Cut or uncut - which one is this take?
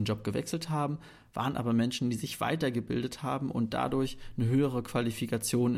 uncut